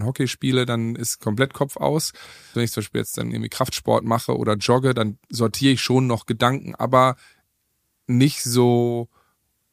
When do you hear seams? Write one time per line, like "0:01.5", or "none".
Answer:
0:02.5